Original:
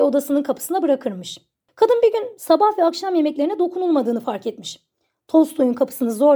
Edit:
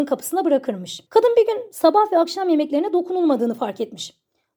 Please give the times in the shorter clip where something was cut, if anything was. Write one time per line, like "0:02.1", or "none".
0:01.1